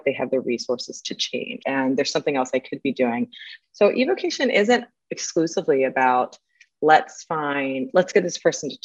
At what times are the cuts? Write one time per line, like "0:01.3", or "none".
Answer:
0:01.6
0:03.6